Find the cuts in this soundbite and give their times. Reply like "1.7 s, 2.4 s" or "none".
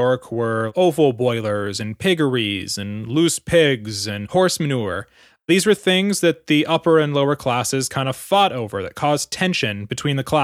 none